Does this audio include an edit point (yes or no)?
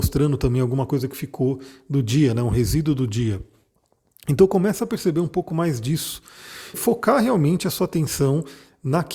yes